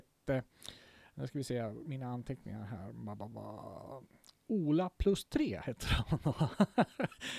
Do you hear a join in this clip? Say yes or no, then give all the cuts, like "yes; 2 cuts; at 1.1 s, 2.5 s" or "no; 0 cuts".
no; 0 cuts